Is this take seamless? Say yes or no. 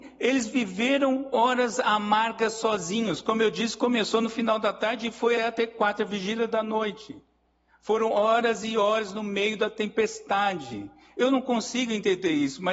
no